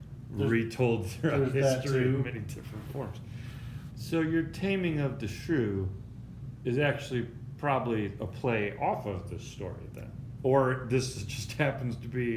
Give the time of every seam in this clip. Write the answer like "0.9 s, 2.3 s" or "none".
3.9 s, 10.4 s